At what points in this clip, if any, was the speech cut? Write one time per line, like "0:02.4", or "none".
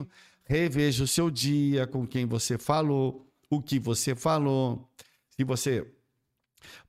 none